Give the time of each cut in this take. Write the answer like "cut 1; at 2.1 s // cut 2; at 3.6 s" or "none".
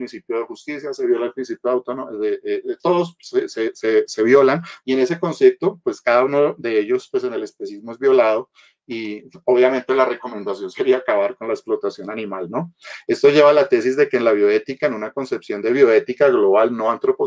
cut 1; at 4.8 s